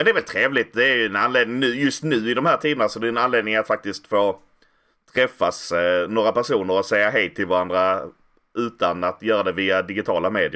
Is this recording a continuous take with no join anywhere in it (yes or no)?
yes